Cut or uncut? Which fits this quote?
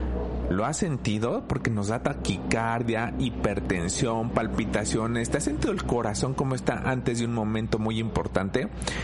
uncut